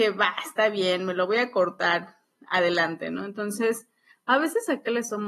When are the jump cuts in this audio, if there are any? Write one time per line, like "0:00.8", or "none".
none